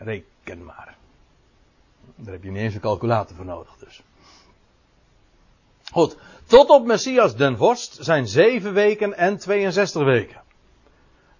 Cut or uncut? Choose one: uncut